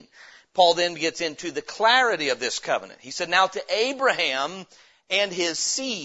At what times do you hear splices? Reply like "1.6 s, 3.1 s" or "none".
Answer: none